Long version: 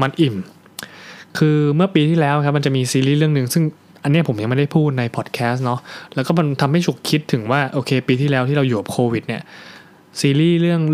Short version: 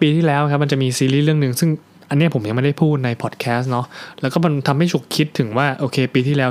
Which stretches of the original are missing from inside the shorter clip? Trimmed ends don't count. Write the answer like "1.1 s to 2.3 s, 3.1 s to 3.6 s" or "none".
none